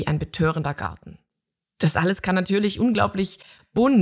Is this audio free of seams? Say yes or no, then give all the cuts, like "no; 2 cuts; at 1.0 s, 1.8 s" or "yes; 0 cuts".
no; 1 cut; at 1.7 s